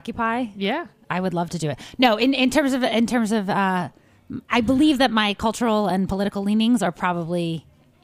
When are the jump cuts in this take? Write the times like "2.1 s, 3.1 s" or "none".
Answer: 4.5 s